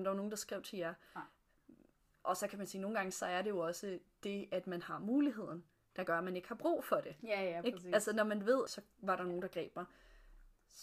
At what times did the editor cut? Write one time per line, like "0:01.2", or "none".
0:08.7